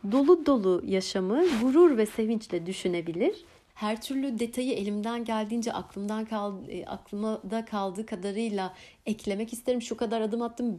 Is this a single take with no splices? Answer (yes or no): no